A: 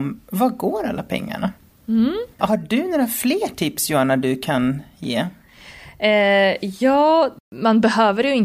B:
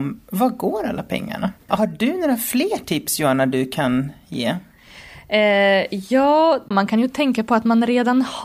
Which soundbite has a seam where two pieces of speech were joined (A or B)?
B